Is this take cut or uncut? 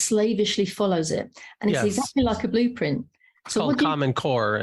uncut